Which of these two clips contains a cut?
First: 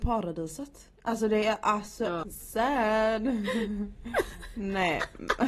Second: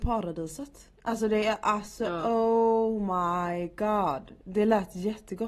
first; 1 cut; at 2.2 s

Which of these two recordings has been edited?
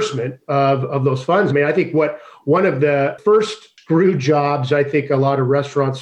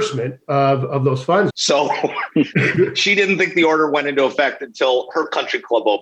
second; 2 cuts; at 1.5 s, 2.5 s

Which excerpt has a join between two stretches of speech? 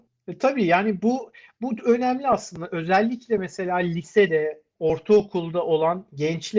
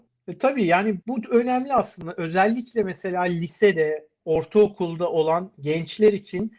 second; 1 cut; at 1.0 s

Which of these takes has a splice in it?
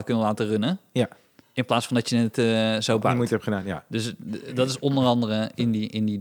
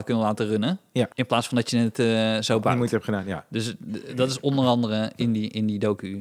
second; 1 cut; at 1.1 s

